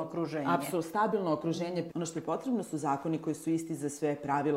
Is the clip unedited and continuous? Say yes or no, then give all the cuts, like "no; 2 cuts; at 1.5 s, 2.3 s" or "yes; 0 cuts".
no; 1 cut; at 1.9 s